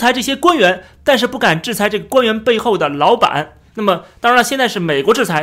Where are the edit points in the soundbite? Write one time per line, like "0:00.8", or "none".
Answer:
0:03.7